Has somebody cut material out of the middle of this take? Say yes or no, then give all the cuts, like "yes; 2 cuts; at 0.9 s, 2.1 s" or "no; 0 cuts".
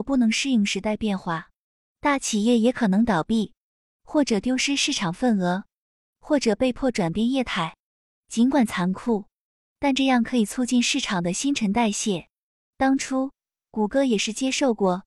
no; 0 cuts